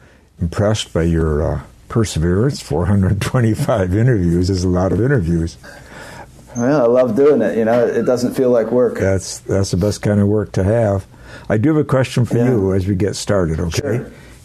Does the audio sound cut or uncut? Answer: uncut